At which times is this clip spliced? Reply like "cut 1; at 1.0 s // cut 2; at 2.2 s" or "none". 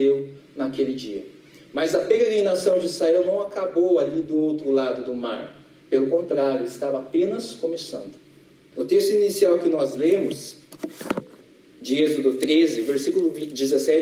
cut 1; at 8.7 s